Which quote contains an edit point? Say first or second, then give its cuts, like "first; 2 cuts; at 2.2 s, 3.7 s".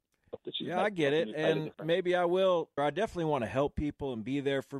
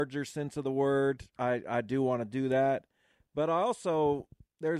first; 1 cut; at 2.8 s